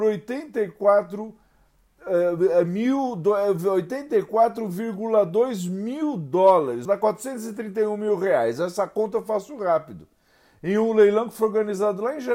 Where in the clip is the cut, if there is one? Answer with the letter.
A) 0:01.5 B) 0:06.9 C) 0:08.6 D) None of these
B